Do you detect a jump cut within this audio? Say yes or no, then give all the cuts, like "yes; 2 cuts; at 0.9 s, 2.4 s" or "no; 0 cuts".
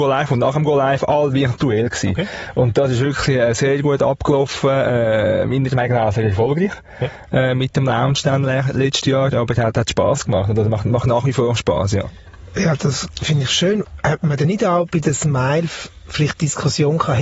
no; 0 cuts